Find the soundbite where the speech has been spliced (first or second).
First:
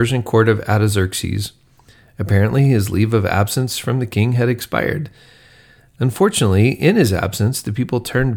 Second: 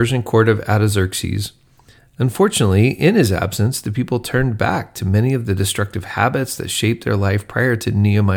second